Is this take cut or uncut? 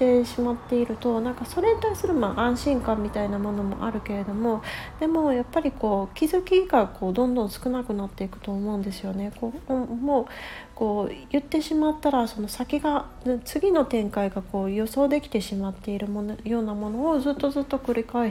uncut